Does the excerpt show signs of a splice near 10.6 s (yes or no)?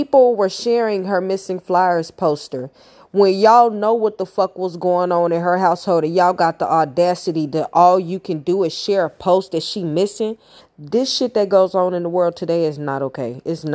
yes